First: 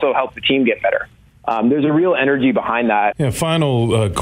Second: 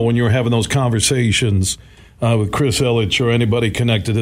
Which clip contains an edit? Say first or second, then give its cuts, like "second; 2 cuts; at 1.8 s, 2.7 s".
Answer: first; 1 cut; at 3.1 s